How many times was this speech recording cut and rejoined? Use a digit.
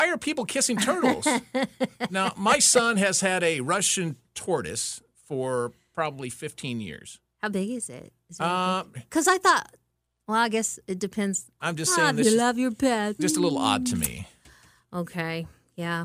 3